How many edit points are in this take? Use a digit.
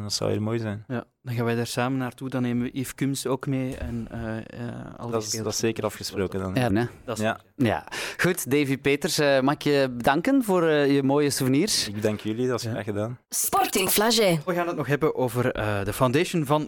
1